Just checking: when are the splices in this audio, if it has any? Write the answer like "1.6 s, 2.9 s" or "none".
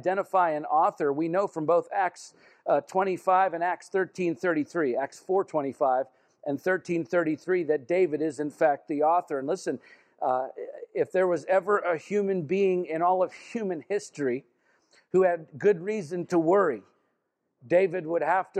none